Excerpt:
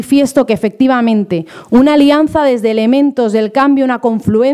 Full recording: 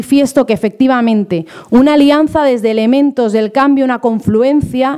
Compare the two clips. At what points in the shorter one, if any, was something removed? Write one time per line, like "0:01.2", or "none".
none